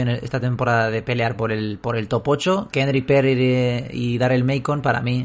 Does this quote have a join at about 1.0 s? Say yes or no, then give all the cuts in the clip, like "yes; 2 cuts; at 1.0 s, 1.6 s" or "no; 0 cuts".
no; 1 cut; at 2.7 s